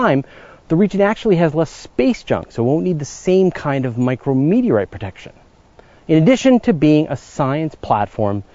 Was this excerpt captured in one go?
yes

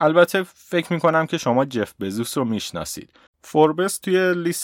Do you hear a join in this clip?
yes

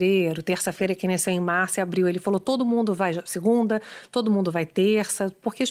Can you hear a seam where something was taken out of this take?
no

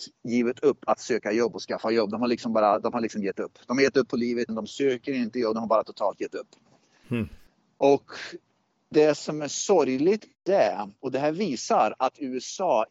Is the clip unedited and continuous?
no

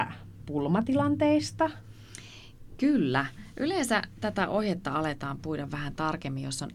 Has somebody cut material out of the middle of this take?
no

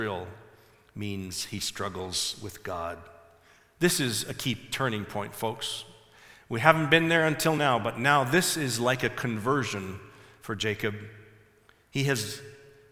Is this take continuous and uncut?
yes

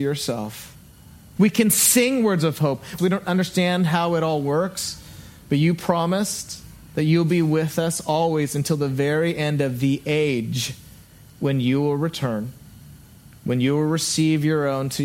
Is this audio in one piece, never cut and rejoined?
no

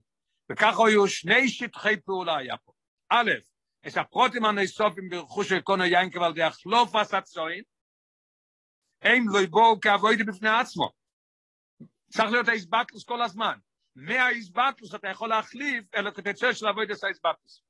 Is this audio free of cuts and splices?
yes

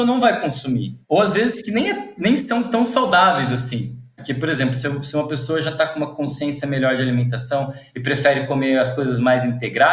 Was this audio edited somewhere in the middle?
no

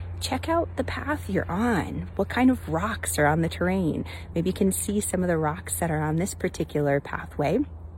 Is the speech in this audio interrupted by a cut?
no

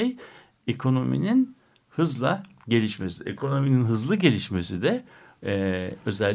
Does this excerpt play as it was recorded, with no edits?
yes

